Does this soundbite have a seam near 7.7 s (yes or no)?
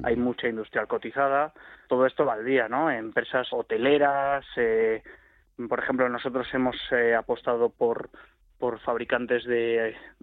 no